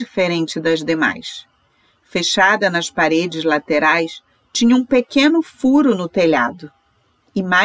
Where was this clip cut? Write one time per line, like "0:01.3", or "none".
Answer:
none